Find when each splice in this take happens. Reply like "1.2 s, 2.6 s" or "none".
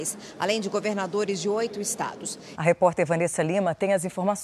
2.5 s